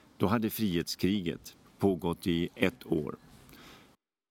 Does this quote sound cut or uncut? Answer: cut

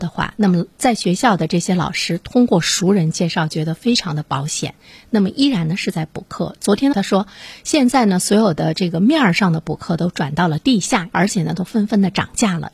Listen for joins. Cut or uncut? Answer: cut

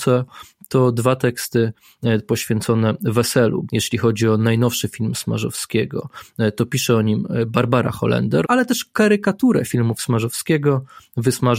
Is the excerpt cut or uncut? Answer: cut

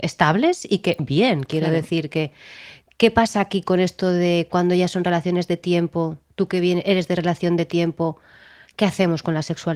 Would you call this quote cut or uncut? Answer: cut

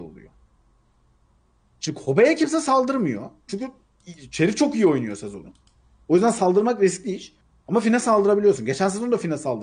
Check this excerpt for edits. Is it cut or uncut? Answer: uncut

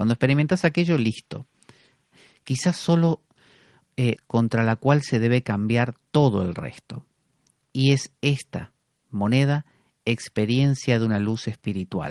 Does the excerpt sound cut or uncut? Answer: cut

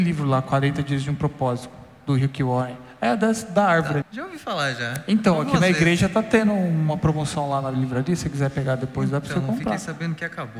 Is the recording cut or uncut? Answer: cut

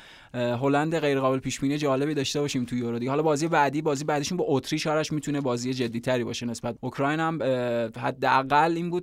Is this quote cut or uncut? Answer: cut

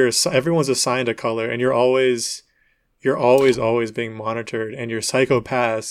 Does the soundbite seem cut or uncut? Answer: cut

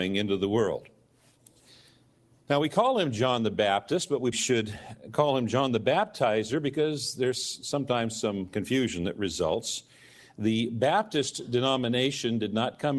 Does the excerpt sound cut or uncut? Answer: cut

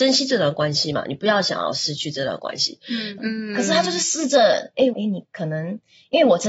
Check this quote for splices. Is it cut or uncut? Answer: cut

